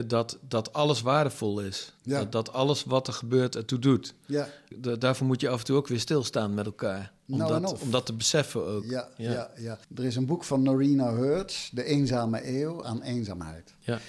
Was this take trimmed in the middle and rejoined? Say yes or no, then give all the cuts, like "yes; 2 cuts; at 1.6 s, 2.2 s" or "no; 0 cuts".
yes; 2 cuts; at 9.8 s, 12.8 s